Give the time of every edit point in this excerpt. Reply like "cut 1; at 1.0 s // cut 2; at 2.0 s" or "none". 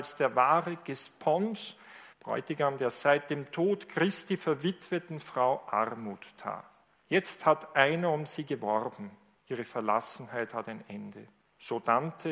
none